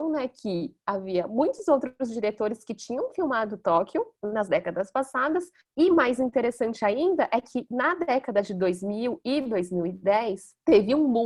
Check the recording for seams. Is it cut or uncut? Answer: uncut